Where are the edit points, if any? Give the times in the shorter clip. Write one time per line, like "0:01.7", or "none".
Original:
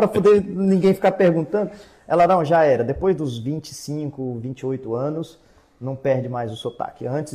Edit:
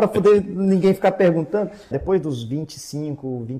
0:01.9